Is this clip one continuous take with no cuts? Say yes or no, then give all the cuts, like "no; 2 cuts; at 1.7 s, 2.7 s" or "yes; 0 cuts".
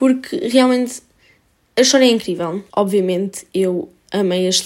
no; 1 cut; at 2.7 s